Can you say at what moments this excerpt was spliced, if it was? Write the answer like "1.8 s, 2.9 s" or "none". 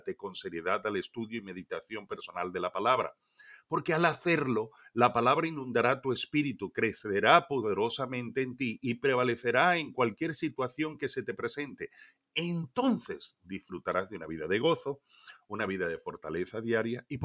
15.5 s